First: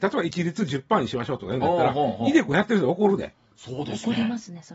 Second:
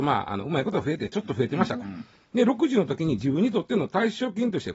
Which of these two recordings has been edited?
second; 1 cut; at 1.8 s

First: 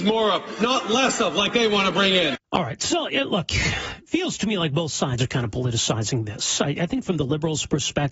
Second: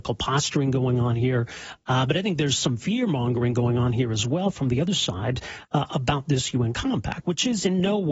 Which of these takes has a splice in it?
first; 1 cut; at 2.4 s

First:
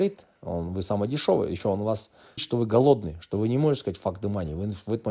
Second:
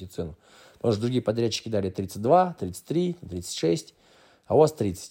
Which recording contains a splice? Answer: first; 1 cut; at 2.4 s

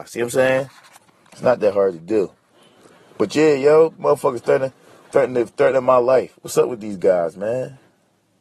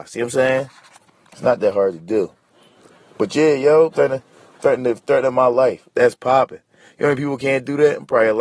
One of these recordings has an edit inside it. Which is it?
second; 2 cuts; at 3.9 s, 5.9 s

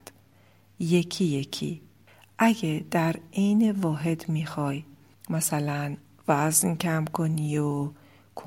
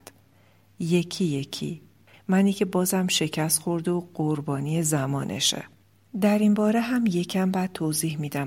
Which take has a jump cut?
second; 1 cut; at 2.1 s

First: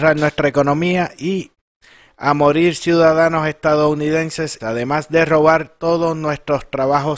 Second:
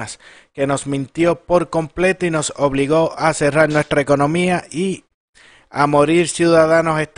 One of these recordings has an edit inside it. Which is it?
first; 1 cut; at 4.6 s

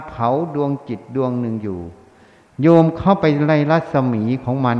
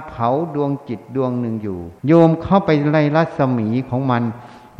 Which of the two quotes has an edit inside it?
second; 1 cut; at 2.0 s

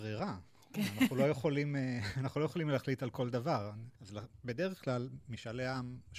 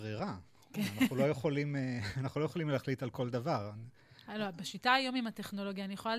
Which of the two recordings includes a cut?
first; 1 cut; at 3.9 s

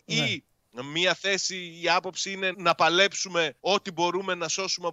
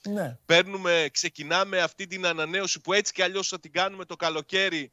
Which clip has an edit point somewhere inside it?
first; 2 cuts; at 2.5 s, 3.6 s

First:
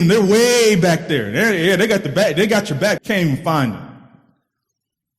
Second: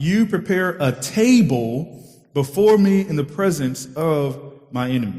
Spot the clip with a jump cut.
first; 1 cut; at 3.0 s

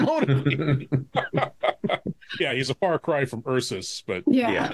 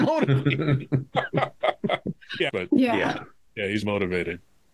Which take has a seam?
second; 2 cuts; at 2.5 s, 3.8 s

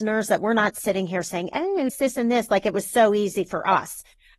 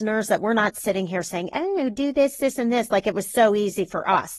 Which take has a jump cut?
first; 1 cut; at 1.9 s

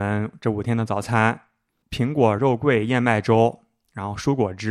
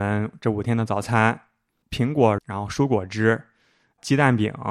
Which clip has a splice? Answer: second; 1 cut; at 2.4 s

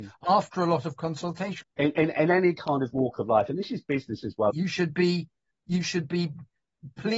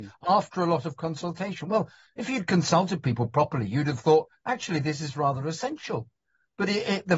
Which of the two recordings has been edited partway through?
first; 2 cuts; at 1.6 s, 4.5 s

